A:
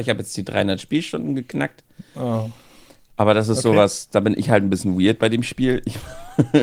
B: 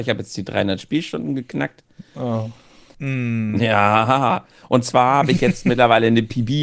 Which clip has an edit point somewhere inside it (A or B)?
B